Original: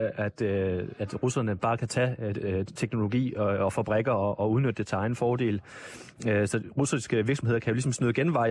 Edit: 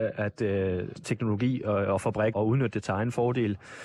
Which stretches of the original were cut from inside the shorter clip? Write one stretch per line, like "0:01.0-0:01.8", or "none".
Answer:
0:00.9-0:02.7
0:04.0-0:04.4